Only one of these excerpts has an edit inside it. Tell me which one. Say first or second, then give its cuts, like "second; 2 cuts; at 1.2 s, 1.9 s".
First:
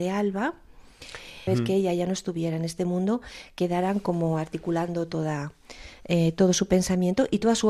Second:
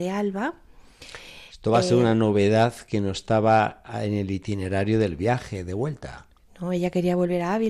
first; 1 cut; at 1.5 s